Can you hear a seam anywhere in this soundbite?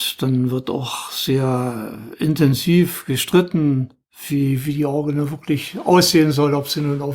no; 0 cuts

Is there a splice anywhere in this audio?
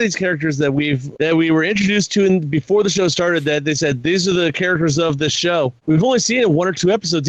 yes; 1 cut; at 1.2 s

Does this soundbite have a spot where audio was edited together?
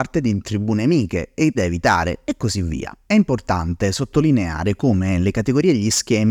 yes; 1 cut; at 1.5 s

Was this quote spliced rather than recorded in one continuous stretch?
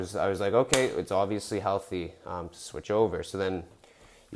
no; 0 cuts

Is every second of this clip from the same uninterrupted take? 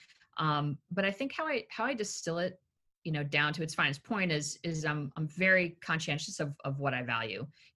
yes; 0 cuts

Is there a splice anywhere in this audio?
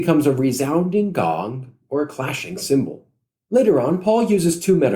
no; 0 cuts

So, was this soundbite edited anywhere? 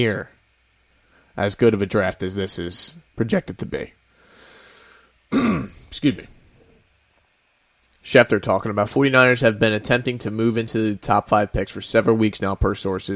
no; 0 cuts

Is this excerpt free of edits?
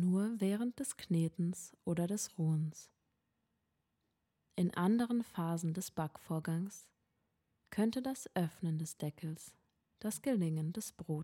yes; 0 cuts

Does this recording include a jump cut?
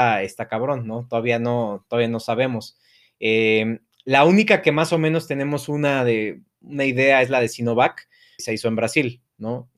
yes; 1 cut; at 8.4 s

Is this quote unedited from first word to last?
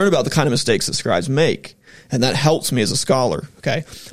yes; 0 cuts

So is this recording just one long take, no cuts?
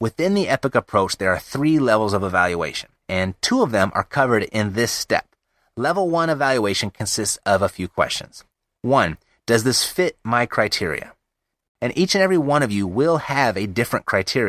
no; 2 cuts; at 3.0 s, 11.6 s

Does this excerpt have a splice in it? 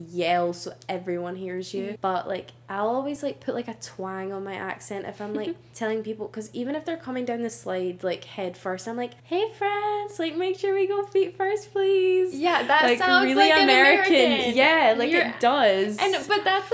yes; 2 cuts; at 2.0 s, 9.2 s

